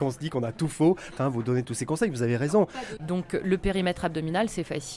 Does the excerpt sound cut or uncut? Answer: cut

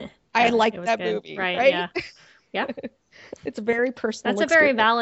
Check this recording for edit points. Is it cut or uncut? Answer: uncut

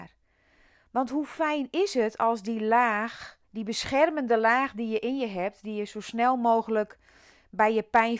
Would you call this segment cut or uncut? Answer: cut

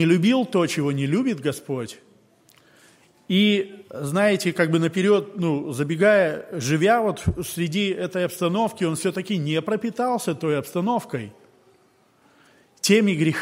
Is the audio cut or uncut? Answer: uncut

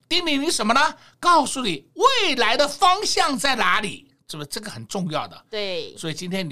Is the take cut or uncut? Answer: uncut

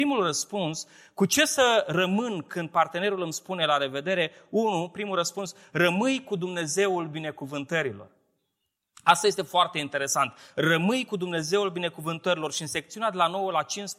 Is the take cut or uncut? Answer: uncut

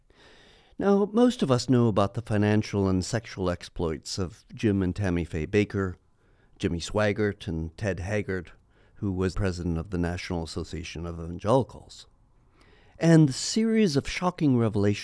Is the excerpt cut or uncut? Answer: cut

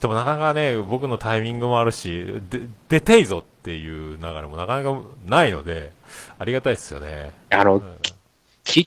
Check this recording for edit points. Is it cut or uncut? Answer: cut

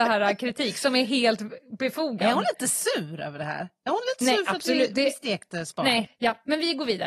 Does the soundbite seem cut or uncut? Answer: cut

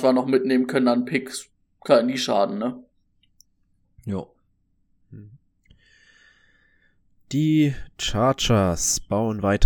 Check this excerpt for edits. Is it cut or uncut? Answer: uncut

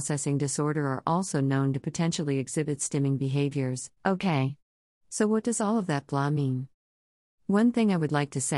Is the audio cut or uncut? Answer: cut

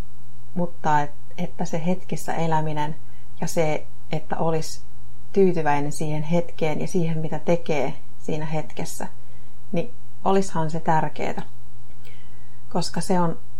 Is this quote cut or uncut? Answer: uncut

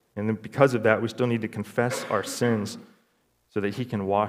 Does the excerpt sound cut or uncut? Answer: uncut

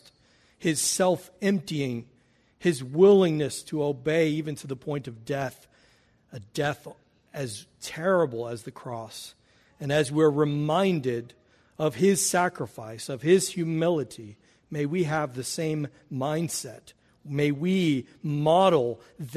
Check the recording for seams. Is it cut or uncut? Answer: uncut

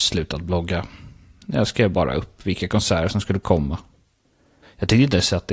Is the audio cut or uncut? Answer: cut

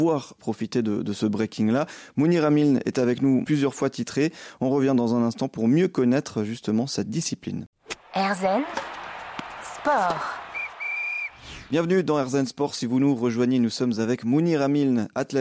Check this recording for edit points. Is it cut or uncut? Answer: cut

